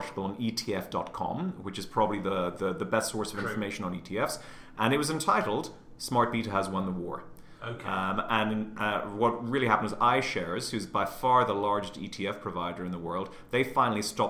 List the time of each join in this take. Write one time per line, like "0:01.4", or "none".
none